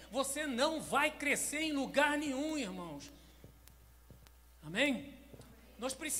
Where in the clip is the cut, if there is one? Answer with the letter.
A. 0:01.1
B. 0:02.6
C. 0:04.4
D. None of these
D